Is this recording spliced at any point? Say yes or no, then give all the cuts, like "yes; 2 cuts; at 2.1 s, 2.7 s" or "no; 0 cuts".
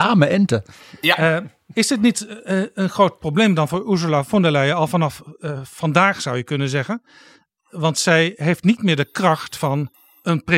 no; 0 cuts